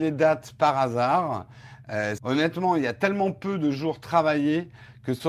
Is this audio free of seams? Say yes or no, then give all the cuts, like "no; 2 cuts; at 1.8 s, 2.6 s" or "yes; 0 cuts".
no; 1 cut; at 2.2 s